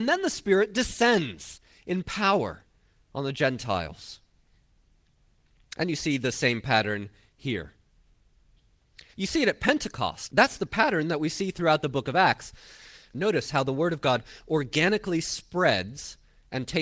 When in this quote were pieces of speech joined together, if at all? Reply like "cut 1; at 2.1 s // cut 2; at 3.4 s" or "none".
cut 1; at 9.1 s // cut 2; at 10.3 s // cut 3; at 13.1 s